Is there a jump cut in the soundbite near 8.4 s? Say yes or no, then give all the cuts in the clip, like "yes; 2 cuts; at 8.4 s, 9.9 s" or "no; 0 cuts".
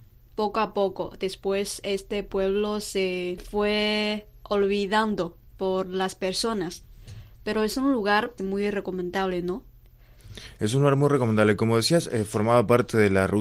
yes; 2 cuts; at 5.5 s, 8.4 s